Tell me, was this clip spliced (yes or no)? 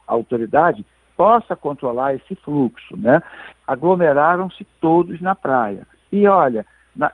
yes